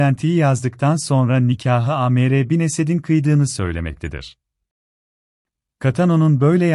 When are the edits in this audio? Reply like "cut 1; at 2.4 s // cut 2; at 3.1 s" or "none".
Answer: none